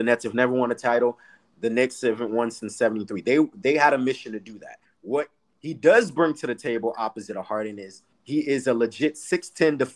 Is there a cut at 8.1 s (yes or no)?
yes